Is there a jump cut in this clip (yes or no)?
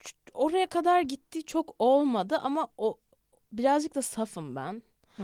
no